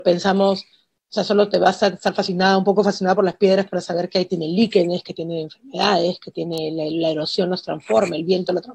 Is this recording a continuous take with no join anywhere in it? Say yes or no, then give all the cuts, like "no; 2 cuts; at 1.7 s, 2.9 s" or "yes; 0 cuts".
yes; 0 cuts